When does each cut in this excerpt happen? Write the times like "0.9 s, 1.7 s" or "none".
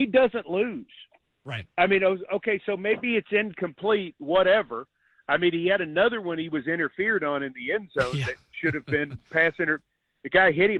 none